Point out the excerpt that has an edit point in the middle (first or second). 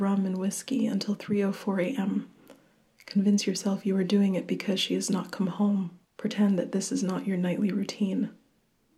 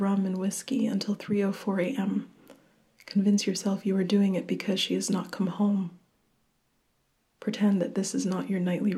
first